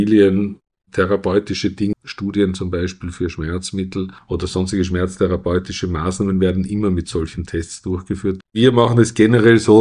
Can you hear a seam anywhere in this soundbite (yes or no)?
yes